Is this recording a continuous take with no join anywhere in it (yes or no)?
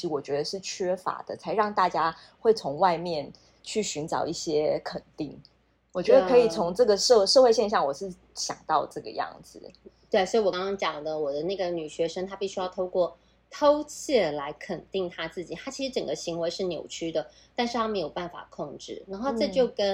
no